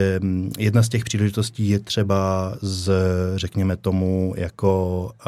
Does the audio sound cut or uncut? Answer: uncut